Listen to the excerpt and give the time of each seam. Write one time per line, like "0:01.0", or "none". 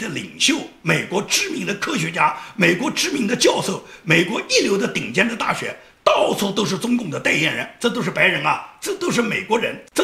none